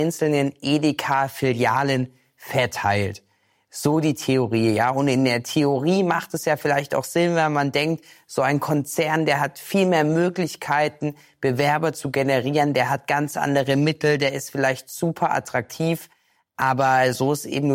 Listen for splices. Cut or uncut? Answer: uncut